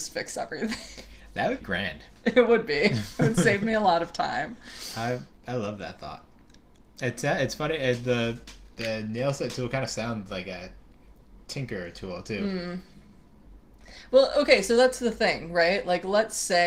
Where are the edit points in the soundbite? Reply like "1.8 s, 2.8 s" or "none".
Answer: 1.6 s